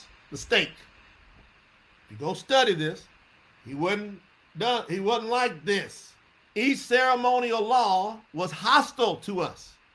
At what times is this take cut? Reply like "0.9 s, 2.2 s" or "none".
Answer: 6.5 s